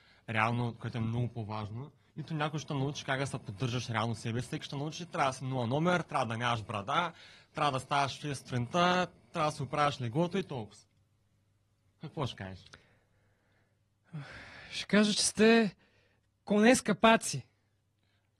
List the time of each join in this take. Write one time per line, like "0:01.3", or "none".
none